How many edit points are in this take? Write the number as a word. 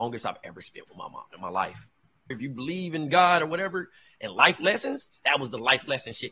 one